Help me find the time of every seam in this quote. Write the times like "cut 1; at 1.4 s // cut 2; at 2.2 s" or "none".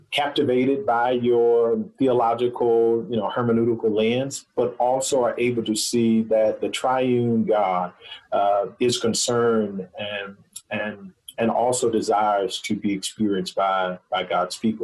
none